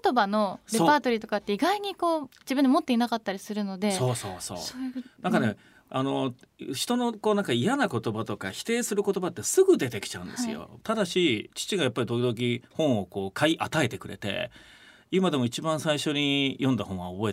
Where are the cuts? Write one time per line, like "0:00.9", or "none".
0:10.8